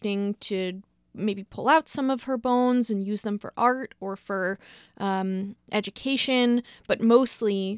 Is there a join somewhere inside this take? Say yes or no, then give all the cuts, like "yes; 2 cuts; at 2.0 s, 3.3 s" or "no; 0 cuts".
no; 0 cuts